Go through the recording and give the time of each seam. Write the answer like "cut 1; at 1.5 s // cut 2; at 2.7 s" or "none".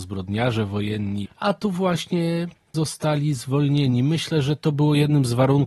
cut 1; at 1.2 s